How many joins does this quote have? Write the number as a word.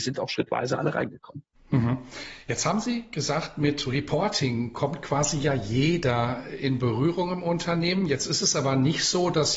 zero